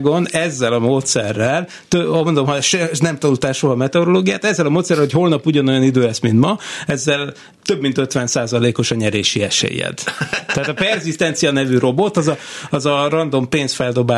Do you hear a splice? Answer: no; 0 cuts

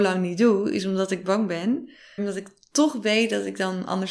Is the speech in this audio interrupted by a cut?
yes; 1 cut; at 2.2 s

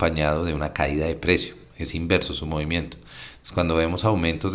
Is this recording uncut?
yes; 0 cuts

